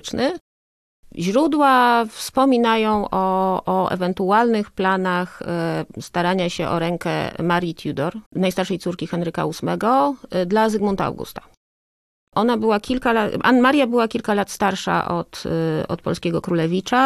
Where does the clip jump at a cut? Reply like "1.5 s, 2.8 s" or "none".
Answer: 8.3 s

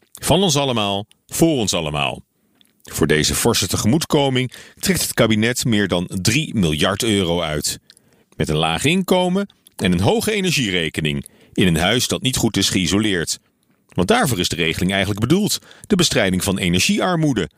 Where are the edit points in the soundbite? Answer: 8.2 s

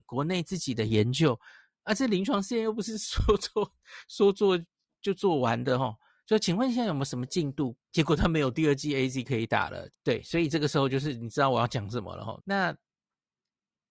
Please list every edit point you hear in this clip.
7.7 s, 9.9 s, 12.4 s

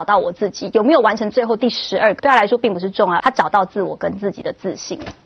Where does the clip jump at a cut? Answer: 2.2 s, 3.2 s

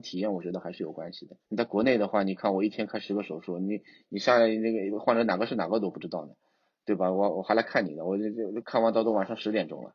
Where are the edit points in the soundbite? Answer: 1.4 s

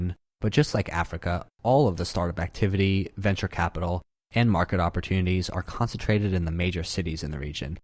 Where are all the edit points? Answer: none

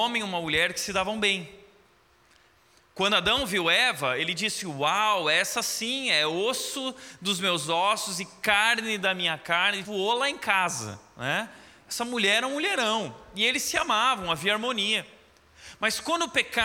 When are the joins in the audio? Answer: 9.8 s

